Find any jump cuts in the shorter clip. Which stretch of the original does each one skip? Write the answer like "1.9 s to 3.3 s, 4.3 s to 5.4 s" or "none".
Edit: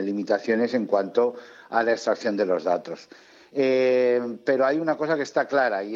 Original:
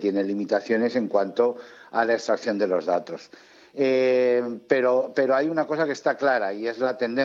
4.7 s to 5.1 s